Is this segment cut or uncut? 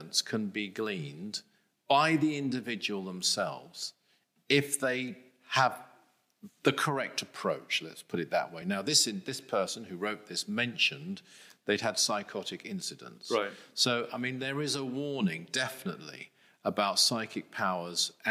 uncut